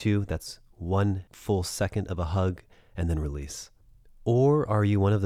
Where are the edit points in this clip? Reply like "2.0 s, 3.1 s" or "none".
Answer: none